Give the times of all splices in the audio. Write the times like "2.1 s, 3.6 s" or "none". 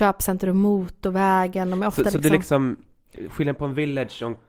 none